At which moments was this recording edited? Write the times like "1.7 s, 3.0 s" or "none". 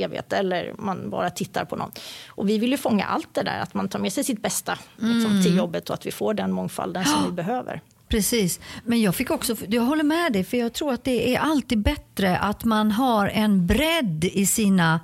8.8 s